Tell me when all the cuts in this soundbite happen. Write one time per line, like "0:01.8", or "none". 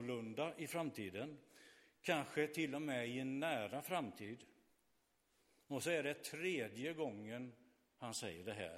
none